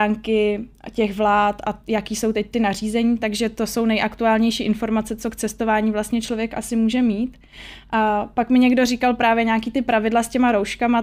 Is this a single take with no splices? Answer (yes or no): yes